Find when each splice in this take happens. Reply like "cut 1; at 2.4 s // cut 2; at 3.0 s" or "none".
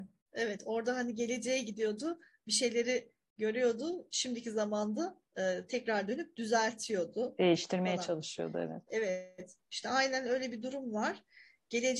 none